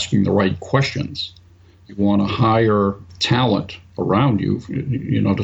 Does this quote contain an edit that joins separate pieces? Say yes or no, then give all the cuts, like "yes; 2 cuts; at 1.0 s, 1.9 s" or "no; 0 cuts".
no; 0 cuts